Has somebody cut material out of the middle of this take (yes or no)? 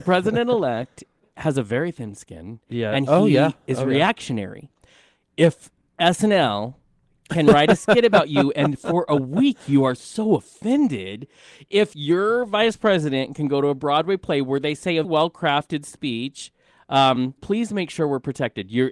yes